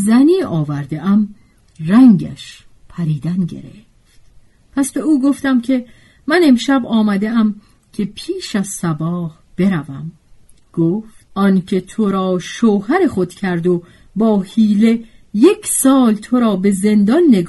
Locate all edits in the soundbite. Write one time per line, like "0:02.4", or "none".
0:11.2